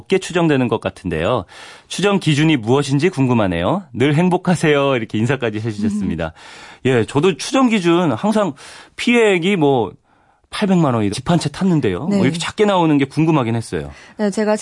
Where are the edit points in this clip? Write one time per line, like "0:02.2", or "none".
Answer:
0:11.1